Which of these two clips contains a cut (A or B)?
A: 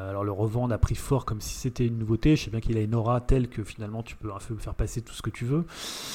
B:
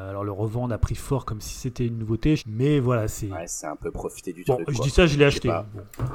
B